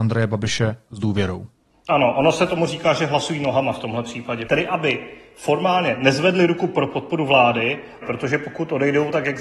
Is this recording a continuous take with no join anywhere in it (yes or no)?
no